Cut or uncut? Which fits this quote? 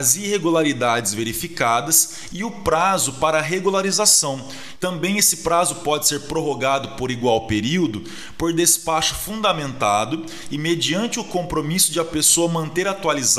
cut